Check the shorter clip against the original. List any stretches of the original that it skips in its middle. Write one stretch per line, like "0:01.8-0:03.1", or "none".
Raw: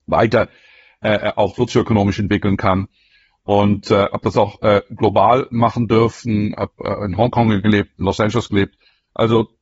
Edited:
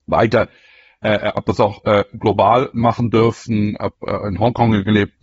0:01.3-0:04.1

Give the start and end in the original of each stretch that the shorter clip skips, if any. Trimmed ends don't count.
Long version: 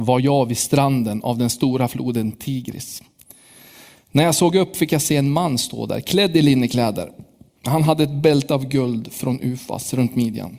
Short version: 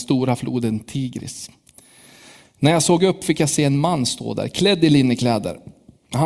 none

